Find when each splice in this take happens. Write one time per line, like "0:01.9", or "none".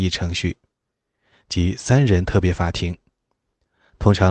none